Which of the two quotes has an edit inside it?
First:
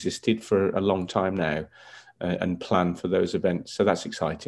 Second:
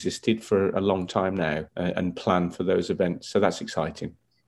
second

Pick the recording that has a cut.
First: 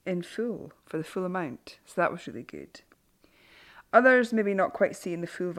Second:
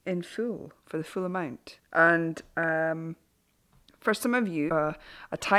second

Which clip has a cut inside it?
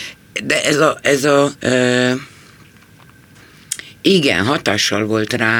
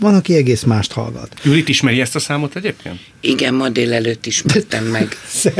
first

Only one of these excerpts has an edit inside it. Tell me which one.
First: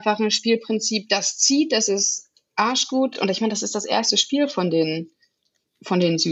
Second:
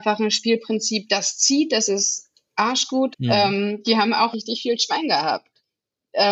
second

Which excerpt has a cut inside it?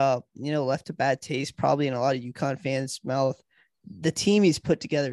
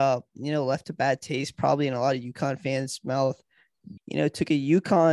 second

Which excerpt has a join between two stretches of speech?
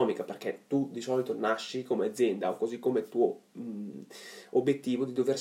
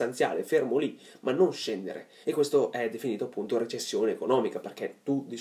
second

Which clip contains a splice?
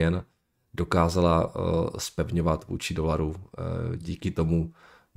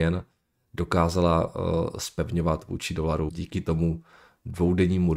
second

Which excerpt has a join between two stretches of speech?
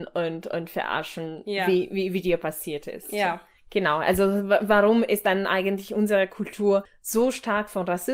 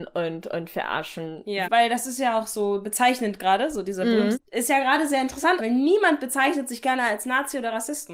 second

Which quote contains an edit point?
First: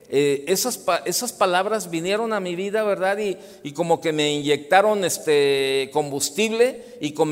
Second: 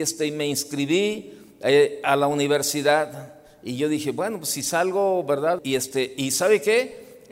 second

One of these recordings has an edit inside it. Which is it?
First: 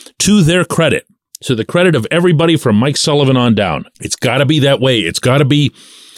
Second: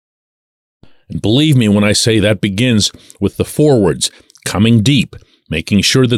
first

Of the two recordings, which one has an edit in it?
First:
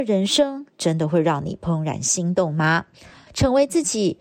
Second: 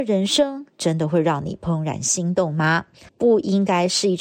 second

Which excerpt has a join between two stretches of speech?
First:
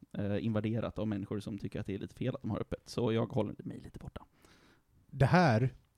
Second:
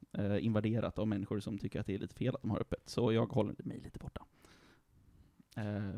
first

